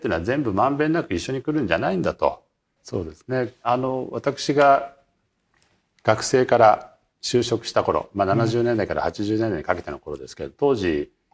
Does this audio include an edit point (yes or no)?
yes